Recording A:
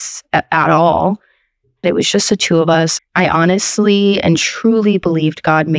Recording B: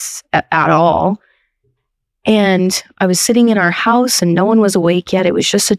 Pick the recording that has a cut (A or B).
A